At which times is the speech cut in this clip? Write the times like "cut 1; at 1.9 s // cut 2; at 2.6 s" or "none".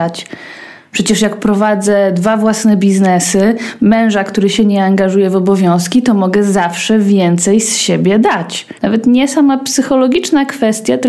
cut 1; at 3.8 s // cut 2; at 8.8 s